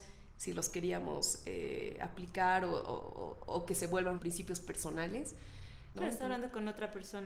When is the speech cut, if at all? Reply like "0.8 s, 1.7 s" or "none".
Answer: 4.2 s, 5.9 s